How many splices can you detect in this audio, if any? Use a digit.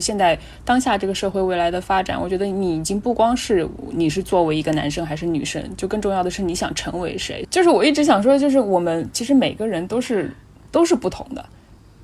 1